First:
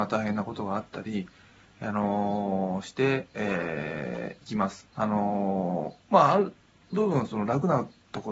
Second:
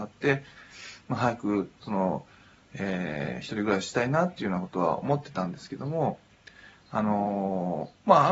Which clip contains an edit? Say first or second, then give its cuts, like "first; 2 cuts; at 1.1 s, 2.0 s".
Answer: first; 1 cut; at 4.9 s